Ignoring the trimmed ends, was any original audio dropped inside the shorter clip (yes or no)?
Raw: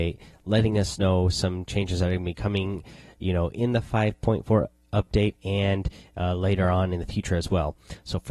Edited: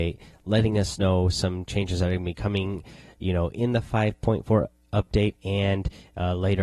no